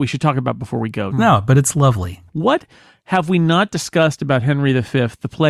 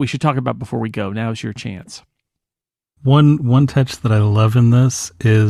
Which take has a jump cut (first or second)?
first